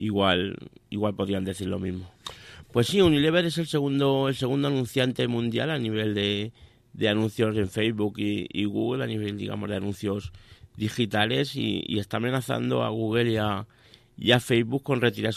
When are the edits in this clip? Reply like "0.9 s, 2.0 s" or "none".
2.6 s